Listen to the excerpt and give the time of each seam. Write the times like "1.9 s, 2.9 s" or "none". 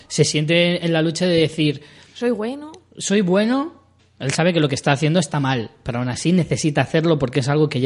4.0 s